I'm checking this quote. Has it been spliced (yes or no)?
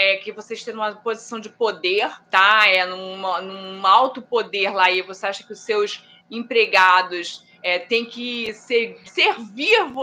yes